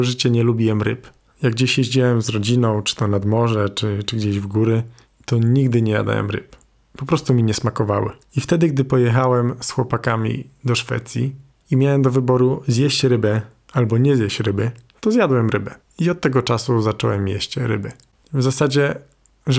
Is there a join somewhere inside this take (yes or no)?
yes